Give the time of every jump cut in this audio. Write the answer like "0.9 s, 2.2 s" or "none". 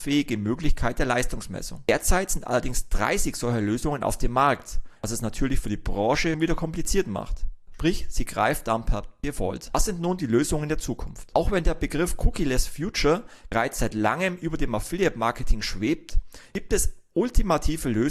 6.3 s, 7.7 s